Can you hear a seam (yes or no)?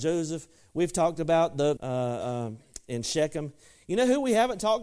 yes